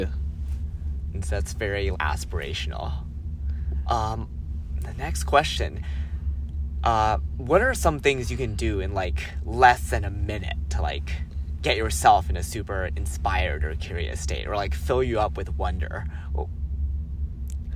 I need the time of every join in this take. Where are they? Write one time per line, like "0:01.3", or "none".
0:01.9
0:03.9